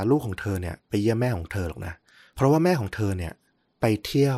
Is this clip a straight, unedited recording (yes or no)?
yes